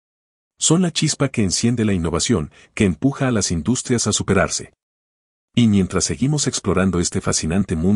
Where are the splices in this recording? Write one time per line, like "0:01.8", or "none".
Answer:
none